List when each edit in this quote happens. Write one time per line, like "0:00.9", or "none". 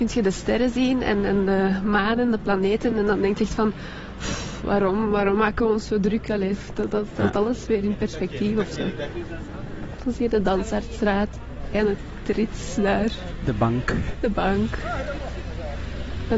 none